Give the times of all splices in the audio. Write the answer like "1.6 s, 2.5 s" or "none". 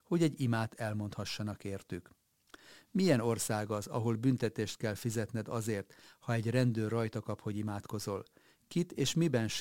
none